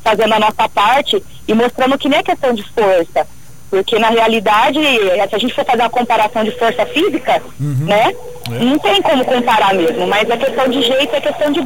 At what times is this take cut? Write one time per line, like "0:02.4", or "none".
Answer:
none